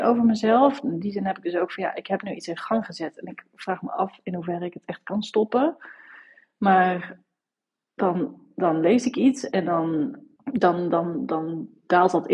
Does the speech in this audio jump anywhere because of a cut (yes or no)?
yes